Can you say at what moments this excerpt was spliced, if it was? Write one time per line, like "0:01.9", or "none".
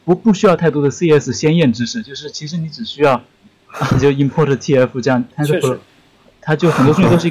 none